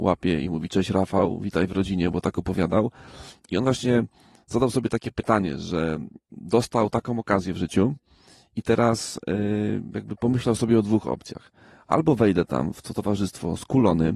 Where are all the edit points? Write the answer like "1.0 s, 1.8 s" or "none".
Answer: none